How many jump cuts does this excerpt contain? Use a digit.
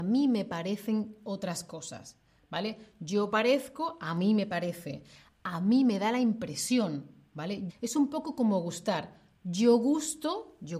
1